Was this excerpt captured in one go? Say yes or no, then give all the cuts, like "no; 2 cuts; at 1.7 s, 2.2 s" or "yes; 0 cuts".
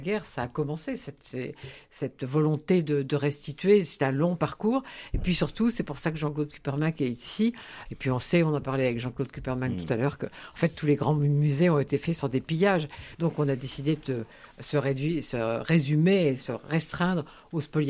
no; 2 cuts; at 7.9 s, 13.1 s